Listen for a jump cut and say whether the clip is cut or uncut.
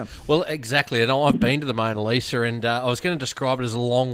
uncut